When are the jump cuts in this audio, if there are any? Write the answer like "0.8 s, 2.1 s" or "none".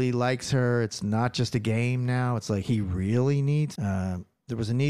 3.7 s